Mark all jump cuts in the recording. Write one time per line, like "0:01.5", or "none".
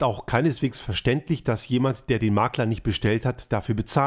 none